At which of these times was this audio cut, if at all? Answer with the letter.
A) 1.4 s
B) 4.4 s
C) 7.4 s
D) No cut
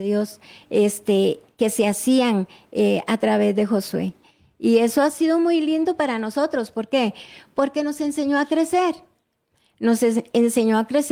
D